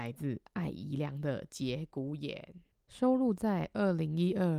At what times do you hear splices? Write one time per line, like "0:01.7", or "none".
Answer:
none